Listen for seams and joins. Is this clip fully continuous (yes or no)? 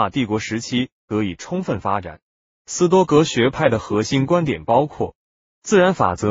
yes